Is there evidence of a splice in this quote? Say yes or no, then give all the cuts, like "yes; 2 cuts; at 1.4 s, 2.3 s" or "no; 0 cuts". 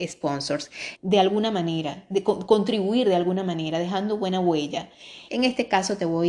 yes; 2 cuts; at 1.0 s, 5.3 s